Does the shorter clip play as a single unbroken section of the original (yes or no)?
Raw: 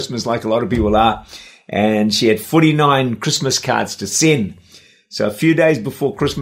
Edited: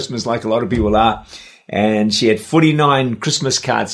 yes